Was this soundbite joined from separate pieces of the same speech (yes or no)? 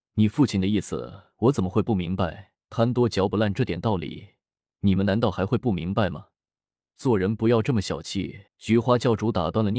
yes